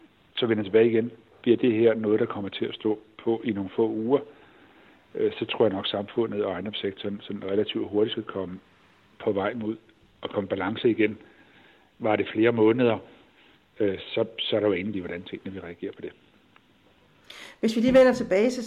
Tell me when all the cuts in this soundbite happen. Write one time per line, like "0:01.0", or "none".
0:14.9